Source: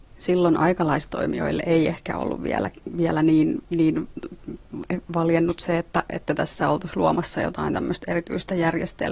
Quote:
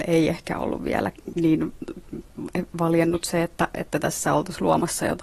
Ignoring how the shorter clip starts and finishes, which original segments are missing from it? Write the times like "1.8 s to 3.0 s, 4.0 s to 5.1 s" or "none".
2.9 s to 3.7 s